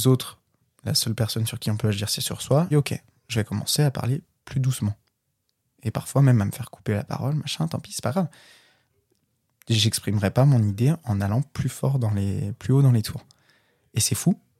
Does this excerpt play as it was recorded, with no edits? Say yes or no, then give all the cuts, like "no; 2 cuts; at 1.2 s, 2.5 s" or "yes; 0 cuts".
no; 1 cut; at 2.7 s